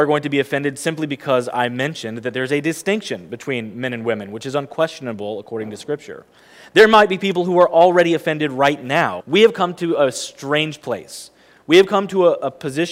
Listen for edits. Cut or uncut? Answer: cut